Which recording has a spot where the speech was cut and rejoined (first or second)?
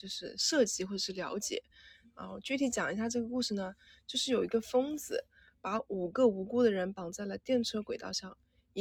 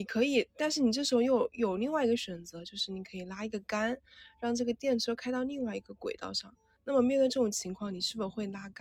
second